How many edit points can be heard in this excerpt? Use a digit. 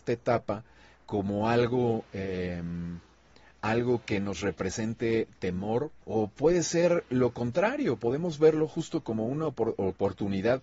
1